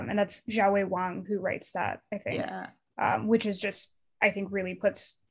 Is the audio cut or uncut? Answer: uncut